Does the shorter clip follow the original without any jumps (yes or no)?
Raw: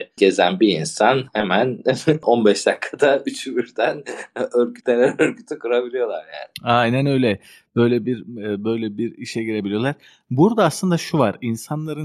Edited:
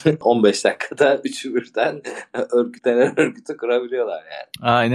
yes